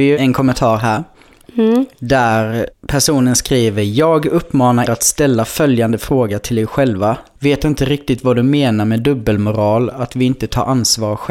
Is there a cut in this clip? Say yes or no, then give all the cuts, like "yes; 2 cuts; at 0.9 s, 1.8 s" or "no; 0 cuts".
yes; 2 cuts; at 4.9 s, 7.4 s